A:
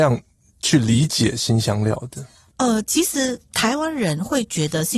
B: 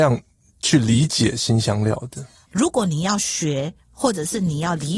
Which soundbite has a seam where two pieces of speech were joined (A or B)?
B